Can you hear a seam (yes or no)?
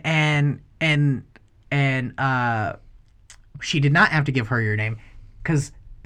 yes